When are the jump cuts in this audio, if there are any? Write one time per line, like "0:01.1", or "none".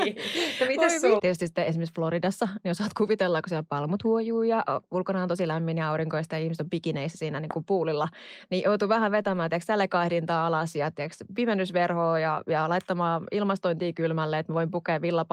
0:01.2